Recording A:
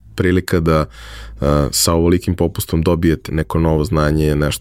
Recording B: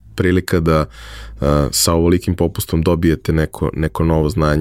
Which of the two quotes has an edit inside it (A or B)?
A